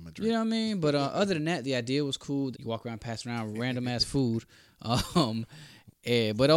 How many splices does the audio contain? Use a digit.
1